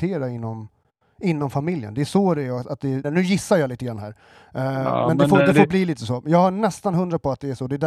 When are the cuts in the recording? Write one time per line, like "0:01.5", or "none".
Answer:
0:03.0